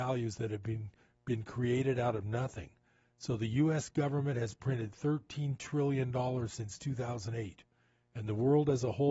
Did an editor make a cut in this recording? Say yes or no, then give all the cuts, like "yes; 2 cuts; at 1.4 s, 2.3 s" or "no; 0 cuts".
no; 0 cuts